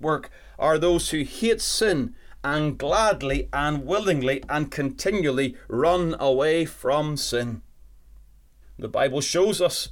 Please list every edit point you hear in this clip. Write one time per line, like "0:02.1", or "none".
0:08.6

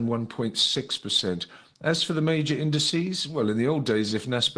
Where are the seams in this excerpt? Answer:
none

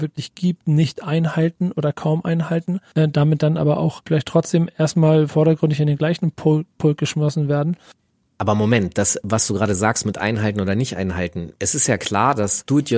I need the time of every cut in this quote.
none

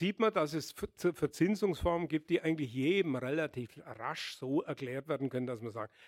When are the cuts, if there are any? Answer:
none

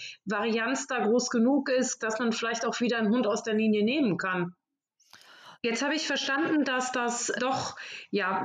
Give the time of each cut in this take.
0:02.0
0:05.6
0:07.4

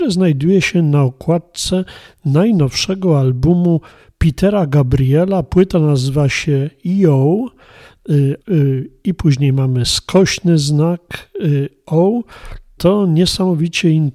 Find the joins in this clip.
0:08.4
0:12.8

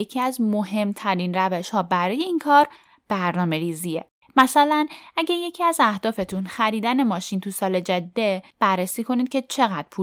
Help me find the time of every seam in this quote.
0:04.2
0:08.5

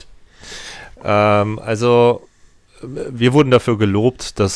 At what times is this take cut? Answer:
none

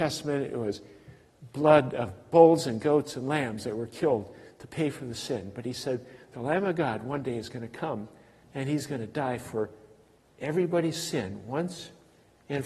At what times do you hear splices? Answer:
0:08.4

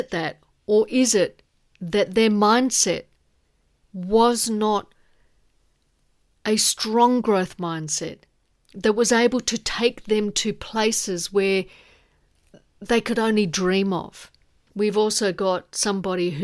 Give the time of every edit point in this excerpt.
0:14.7

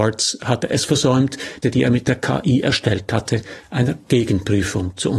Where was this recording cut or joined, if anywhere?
0:01.6

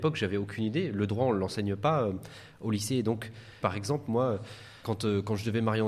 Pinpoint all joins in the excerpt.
0:03.6
0:04.8

